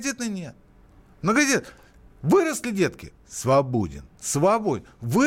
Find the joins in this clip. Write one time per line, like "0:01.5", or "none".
none